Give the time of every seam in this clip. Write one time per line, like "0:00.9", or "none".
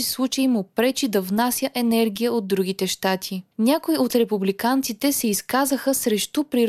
0:03.5